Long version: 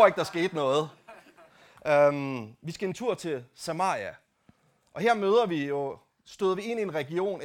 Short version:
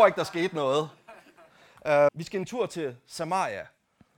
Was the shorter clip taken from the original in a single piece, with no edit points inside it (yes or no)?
no